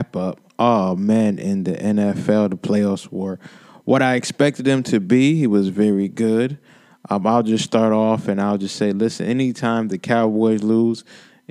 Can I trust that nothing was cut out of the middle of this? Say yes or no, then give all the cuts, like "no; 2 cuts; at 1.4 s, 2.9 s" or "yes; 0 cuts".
yes; 0 cuts